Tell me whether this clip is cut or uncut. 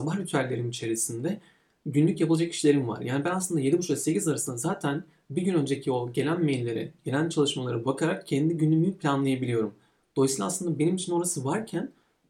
uncut